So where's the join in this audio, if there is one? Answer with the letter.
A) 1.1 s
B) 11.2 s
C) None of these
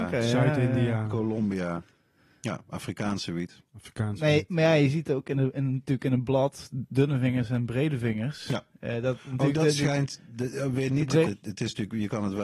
B